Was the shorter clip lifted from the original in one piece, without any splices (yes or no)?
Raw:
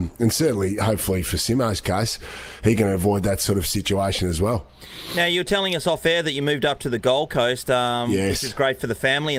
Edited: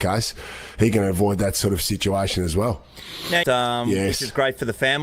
no